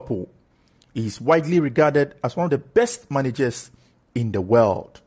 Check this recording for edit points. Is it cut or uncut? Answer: uncut